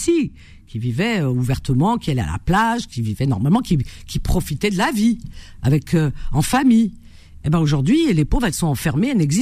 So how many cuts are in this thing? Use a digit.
0